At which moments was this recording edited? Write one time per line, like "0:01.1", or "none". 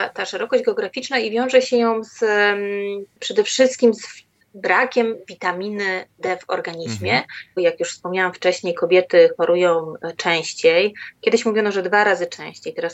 0:07.6